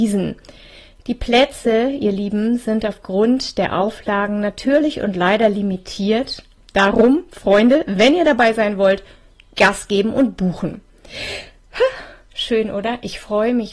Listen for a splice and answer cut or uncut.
uncut